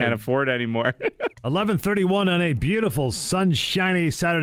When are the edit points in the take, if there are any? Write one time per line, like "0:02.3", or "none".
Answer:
0:01.3